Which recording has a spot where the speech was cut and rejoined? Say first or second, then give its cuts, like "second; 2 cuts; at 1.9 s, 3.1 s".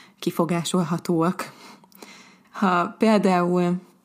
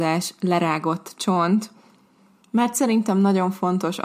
first; 1 cut; at 2.4 s